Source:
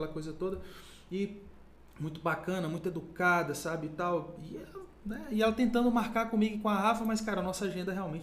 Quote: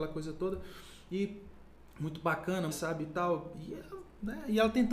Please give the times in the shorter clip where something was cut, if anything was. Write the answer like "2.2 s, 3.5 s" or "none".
2.7 s